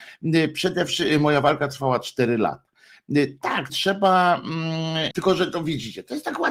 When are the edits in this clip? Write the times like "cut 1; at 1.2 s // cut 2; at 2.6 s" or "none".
cut 1; at 3.7 s // cut 2; at 5.1 s